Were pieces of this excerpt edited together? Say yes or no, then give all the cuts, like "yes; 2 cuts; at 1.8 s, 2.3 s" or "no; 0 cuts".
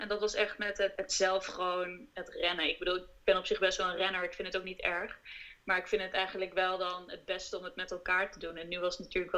yes; 1 cut; at 1.0 s